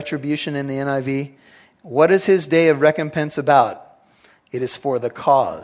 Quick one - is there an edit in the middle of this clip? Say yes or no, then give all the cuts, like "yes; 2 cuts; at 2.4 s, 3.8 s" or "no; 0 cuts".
no; 0 cuts